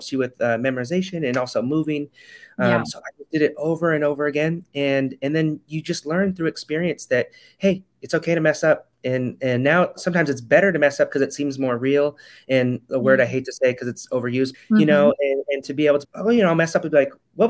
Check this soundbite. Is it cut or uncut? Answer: cut